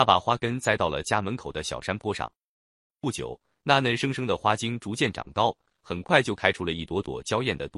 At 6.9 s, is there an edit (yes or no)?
no